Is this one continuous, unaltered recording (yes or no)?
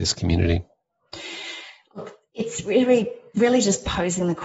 yes